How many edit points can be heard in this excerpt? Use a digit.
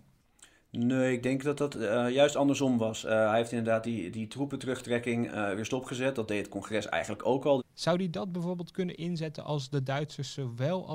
2